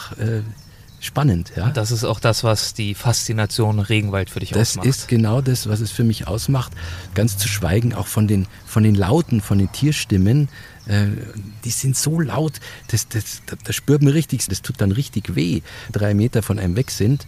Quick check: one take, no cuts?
no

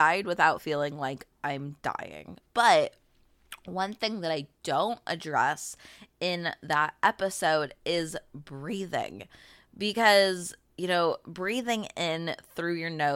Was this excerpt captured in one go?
no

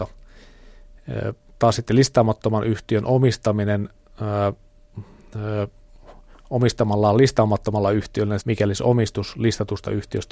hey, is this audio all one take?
no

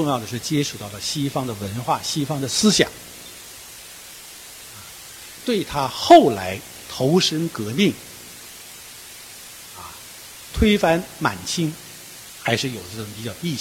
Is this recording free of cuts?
no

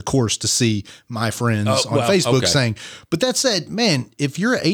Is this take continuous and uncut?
yes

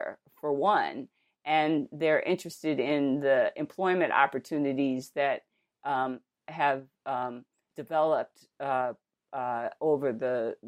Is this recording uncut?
no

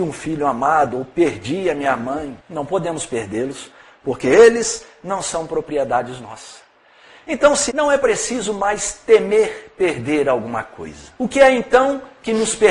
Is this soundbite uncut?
no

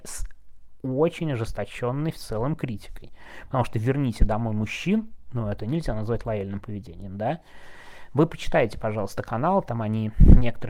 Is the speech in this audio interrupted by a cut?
no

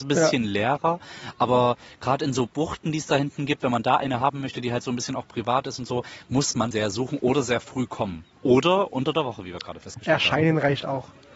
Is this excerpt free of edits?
no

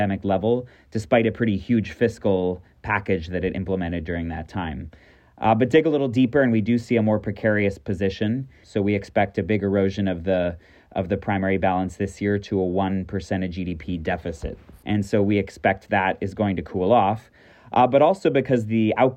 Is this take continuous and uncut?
no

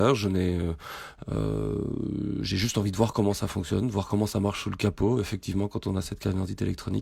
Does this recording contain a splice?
no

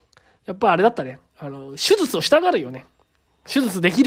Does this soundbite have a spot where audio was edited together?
no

